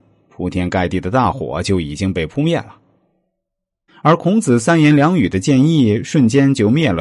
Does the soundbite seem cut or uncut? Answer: cut